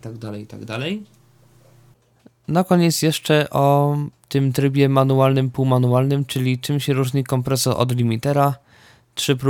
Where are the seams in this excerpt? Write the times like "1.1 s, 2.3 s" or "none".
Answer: none